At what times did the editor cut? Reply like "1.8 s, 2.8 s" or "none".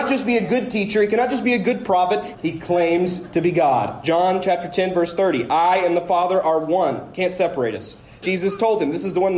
2.3 s, 8.2 s